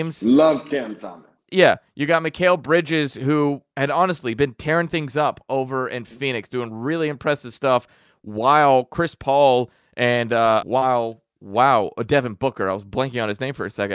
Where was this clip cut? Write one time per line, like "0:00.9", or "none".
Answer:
0:10.6